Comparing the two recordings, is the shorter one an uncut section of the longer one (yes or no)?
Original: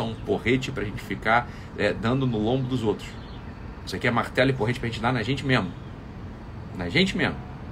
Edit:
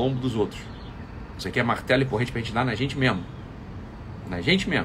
yes